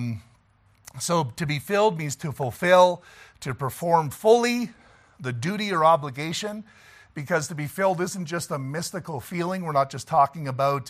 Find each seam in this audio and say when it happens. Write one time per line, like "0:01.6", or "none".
none